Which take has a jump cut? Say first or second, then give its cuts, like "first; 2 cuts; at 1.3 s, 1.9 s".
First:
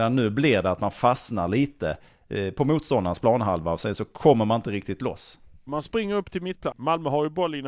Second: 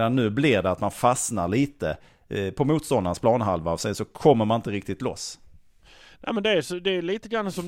first; 2 cuts; at 5.7 s, 6.7 s